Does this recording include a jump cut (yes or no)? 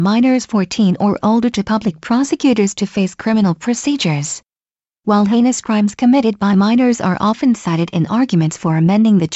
yes